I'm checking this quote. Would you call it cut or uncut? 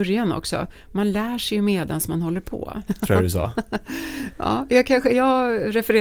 cut